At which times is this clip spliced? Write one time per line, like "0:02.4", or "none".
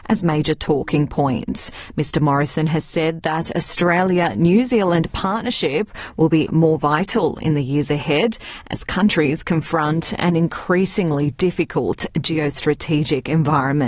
0:06.5